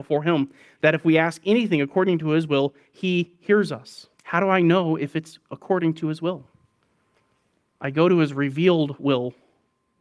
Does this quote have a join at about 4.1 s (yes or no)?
yes